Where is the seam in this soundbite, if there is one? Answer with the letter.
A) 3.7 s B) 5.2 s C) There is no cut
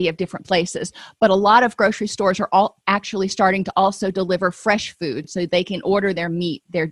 C